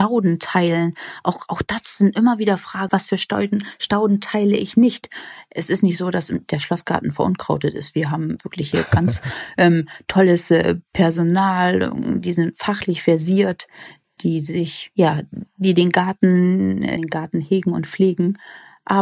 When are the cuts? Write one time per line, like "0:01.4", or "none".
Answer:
0:02.9
0:17.0